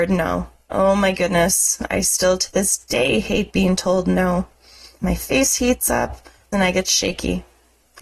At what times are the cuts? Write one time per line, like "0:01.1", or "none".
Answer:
0:05.0
0:06.5